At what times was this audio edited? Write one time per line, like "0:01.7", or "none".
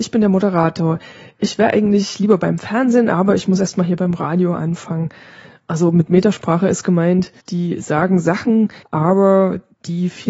0:07.4
0:08.8